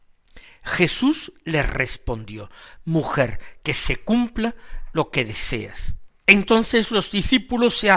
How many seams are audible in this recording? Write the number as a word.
two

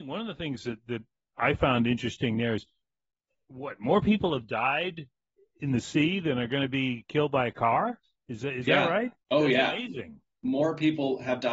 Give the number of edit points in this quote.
one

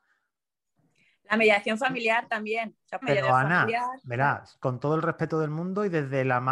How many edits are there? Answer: one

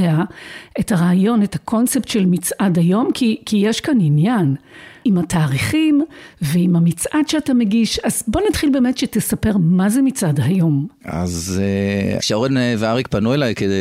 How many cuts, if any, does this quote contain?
two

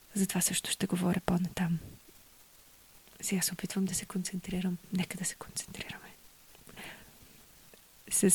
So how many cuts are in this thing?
zero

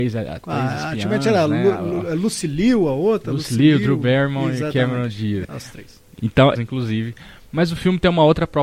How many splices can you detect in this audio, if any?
two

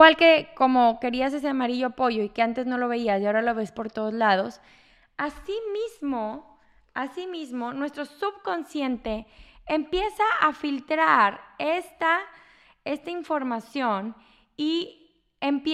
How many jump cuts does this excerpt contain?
zero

